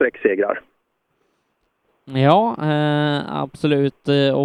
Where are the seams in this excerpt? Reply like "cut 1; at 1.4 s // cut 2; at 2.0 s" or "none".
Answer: none